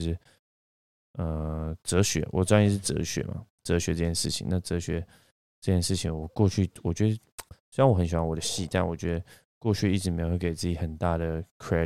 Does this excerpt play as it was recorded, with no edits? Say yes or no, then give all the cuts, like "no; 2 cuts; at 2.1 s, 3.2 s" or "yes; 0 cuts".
yes; 0 cuts